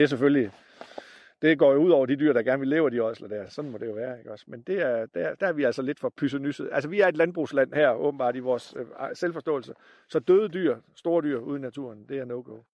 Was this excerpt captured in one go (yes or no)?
yes